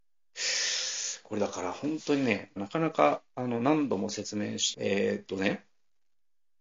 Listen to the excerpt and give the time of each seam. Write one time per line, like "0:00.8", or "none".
0:02.6
0:04.7